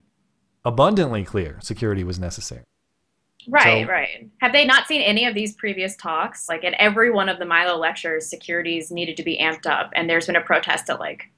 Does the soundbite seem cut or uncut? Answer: uncut